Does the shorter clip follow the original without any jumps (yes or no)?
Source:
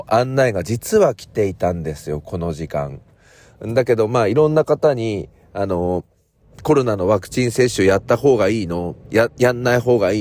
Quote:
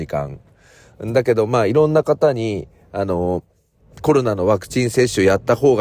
yes